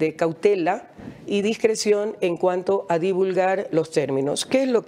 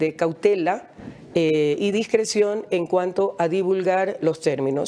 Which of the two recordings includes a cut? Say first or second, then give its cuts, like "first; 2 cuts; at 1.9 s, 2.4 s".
first; 1 cut; at 1.3 s